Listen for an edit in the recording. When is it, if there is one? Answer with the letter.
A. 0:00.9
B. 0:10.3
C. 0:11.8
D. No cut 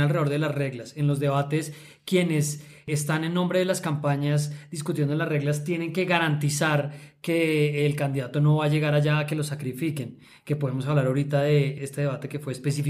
C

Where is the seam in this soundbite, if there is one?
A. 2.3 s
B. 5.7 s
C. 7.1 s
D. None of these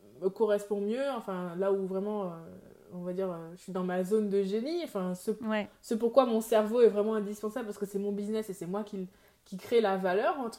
D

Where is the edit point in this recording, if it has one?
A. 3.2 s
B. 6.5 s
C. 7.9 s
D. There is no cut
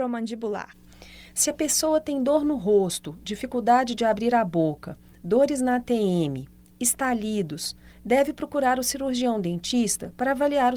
C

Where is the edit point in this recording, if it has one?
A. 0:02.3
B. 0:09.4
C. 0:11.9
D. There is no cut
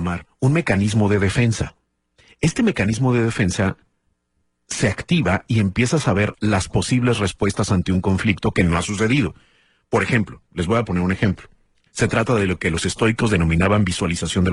C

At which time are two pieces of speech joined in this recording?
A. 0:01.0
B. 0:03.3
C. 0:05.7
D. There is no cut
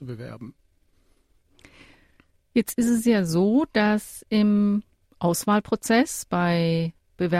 D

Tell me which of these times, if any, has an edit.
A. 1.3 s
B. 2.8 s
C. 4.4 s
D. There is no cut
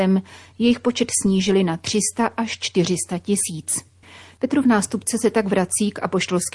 C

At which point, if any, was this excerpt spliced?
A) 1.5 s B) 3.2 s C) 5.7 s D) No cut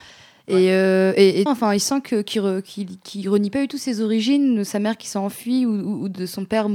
A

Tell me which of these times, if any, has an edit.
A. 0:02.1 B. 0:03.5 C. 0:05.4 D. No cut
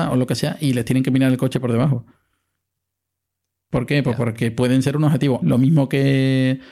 C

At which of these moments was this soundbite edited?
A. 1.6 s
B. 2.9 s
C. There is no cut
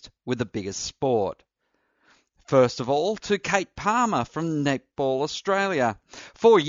C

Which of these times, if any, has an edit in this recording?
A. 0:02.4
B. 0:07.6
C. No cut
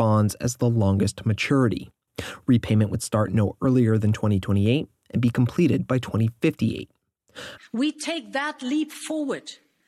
B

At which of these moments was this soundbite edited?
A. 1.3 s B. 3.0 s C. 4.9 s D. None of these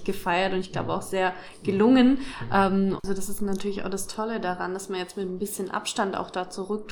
B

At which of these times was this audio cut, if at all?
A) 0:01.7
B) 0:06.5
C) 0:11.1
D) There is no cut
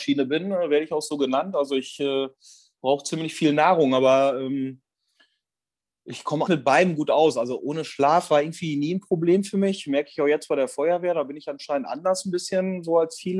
B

